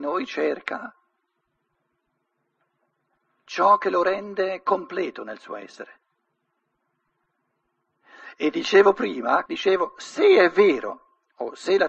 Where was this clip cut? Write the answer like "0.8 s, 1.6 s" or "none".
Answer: 9.5 s